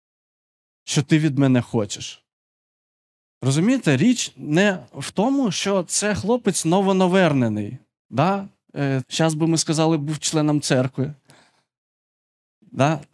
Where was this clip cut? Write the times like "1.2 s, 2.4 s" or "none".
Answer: 9.0 s